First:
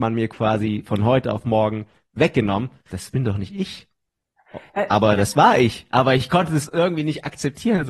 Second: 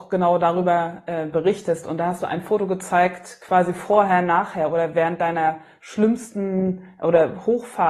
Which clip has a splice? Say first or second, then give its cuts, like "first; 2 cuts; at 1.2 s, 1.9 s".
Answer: first; 1 cut; at 2.9 s